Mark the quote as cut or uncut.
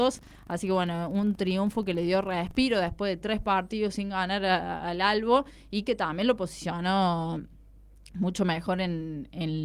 uncut